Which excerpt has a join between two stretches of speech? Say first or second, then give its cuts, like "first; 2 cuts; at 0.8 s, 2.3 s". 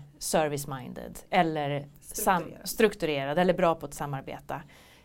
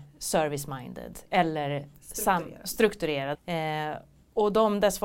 second; 1 cut; at 3.3 s